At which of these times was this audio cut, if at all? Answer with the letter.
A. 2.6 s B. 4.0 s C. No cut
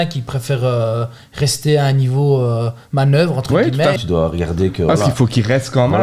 B